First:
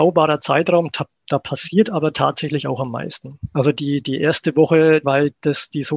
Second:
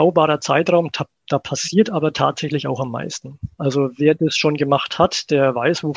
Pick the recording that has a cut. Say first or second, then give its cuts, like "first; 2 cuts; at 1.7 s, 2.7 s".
first; 2 cuts; at 3.5 s, 5.0 s